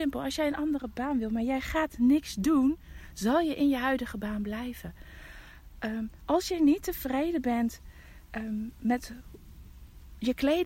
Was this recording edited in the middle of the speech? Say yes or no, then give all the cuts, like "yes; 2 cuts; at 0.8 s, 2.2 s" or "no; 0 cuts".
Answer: no; 0 cuts